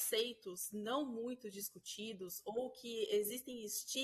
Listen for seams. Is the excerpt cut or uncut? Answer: uncut